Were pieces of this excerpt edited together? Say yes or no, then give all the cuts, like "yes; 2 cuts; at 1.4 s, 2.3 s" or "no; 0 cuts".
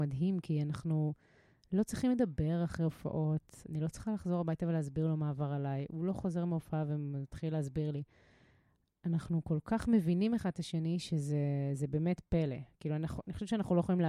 no; 0 cuts